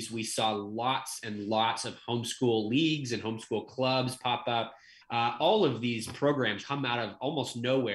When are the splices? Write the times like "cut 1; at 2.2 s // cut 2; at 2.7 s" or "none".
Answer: cut 1; at 5.0 s // cut 2; at 6.6 s